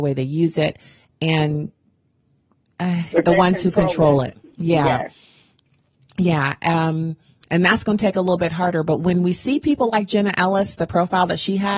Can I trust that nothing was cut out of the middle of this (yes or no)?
no